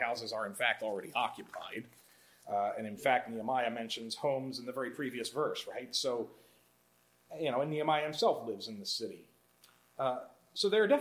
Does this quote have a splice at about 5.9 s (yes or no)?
no